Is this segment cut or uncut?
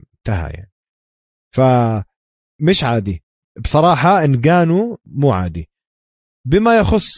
uncut